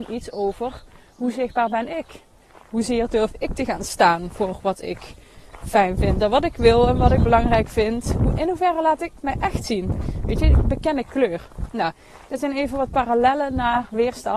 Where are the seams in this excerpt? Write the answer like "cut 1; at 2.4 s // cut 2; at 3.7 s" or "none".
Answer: none